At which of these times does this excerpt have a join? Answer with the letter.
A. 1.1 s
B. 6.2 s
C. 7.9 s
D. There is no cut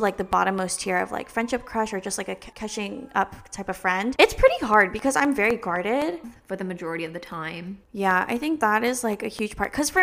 B